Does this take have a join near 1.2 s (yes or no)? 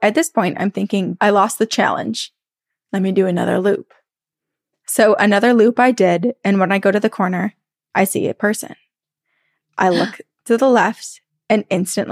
yes